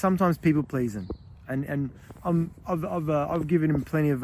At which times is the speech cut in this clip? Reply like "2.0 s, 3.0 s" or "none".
none